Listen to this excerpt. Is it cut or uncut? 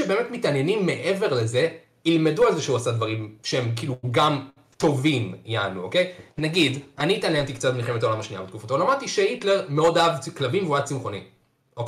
uncut